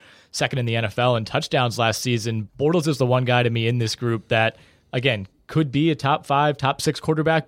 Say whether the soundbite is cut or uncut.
cut